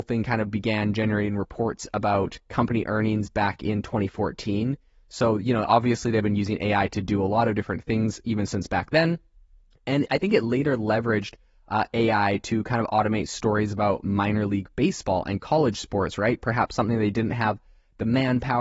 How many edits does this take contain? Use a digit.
0